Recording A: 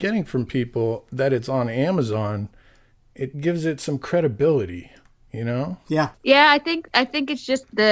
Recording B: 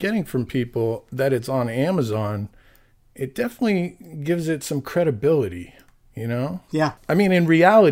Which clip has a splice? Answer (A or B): A